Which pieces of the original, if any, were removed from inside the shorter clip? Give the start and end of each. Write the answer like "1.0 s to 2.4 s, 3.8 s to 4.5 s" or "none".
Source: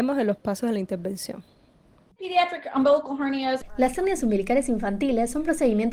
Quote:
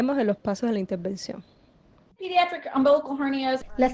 none